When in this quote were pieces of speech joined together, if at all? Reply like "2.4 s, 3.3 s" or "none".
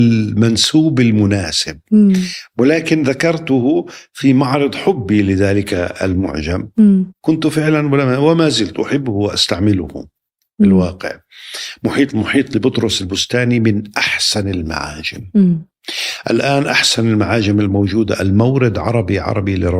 none